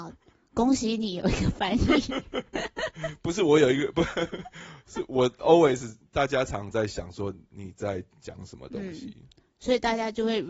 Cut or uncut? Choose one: uncut